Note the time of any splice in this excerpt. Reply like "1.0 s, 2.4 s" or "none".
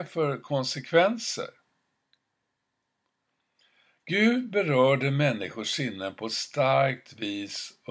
none